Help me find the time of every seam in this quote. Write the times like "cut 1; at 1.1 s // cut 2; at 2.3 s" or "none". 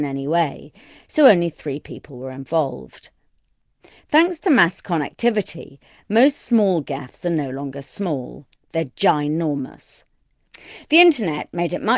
none